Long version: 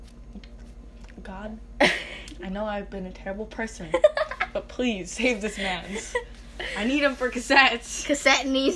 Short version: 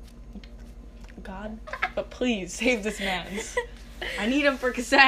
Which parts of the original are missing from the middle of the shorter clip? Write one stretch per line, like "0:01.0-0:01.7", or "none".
0:01.7-0:04.2